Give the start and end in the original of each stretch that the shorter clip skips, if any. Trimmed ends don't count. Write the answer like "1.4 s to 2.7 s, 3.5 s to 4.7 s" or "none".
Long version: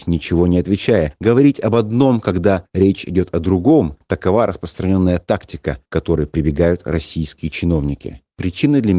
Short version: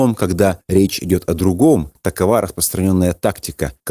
none